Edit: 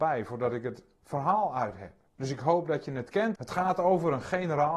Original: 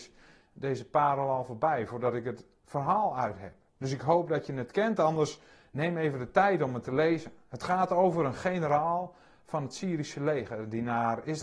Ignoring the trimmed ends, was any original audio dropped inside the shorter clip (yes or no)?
yes